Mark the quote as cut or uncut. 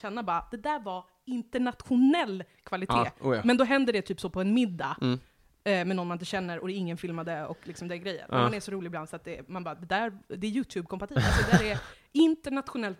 uncut